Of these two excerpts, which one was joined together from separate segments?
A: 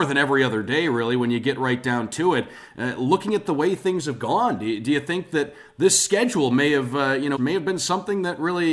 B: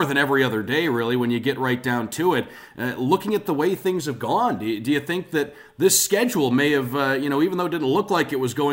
A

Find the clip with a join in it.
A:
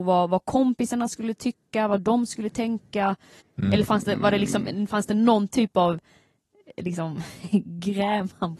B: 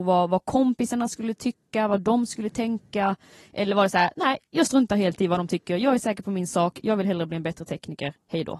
A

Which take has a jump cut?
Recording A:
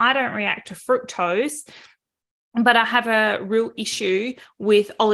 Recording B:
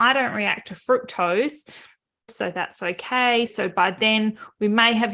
B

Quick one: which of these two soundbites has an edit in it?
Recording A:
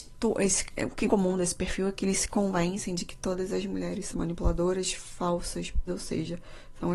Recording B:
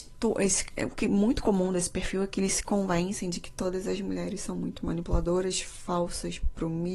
A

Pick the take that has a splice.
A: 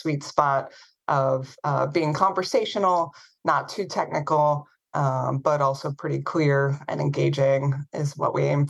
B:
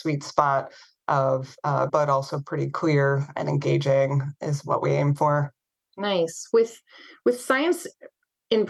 B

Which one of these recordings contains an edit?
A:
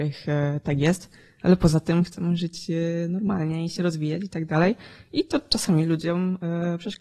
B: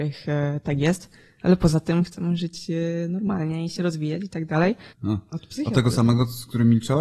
B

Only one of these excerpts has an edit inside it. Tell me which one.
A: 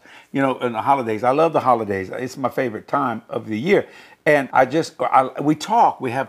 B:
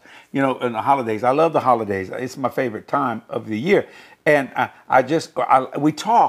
A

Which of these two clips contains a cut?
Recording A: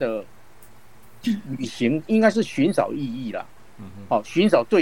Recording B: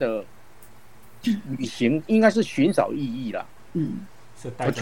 B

